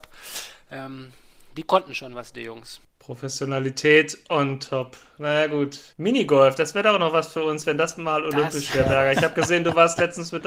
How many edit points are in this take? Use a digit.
1